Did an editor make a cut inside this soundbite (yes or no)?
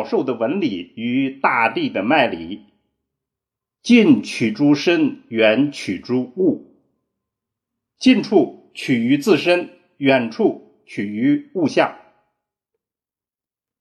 no